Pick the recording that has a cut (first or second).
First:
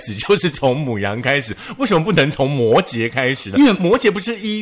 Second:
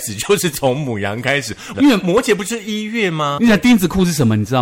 second